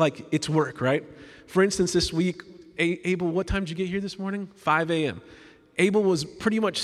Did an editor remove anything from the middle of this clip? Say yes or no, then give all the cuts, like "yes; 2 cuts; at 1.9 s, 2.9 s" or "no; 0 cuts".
no; 0 cuts